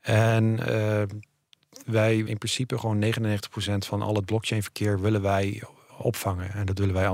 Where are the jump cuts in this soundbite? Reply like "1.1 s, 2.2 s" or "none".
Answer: 2.3 s, 5.9 s